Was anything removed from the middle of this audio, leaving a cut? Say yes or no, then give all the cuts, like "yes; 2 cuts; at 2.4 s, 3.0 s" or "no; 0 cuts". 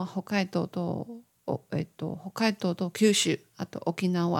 no; 0 cuts